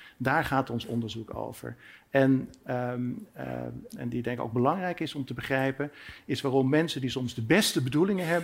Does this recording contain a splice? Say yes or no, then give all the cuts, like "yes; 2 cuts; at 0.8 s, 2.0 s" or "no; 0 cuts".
yes; 1 cut; at 3.9 s